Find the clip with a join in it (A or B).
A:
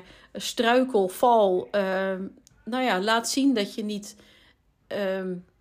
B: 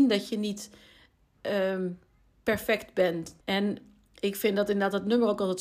B